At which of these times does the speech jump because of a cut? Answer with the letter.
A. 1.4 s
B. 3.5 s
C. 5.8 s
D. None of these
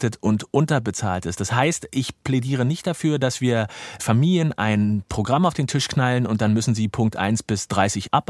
D